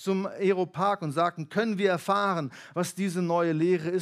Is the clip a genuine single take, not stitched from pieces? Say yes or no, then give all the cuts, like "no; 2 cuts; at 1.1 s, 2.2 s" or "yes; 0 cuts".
yes; 0 cuts